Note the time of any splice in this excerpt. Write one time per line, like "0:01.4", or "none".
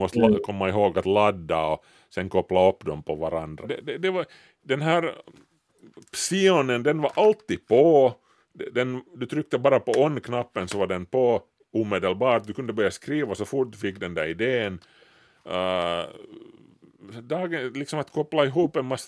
0:03.6